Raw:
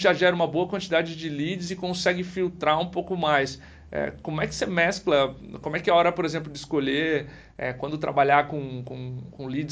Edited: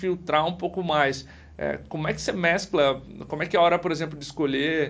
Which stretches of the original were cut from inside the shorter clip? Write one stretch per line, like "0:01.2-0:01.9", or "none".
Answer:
none

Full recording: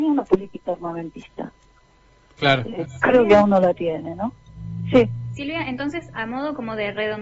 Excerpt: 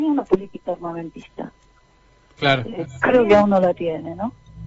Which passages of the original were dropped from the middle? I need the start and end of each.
none

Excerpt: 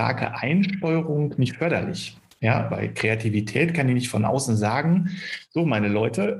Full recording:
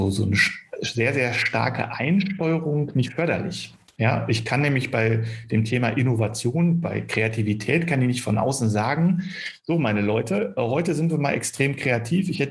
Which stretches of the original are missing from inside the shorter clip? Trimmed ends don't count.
0:04.3-0:06.8

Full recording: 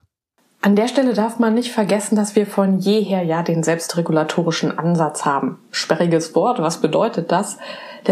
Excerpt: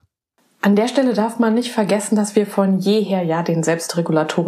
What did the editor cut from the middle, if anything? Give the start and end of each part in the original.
none

